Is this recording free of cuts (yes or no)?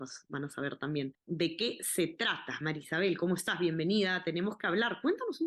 yes